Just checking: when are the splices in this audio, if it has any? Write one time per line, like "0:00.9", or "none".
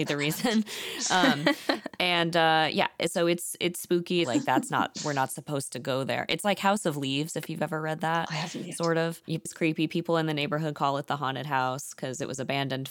0:04.2
0:09.5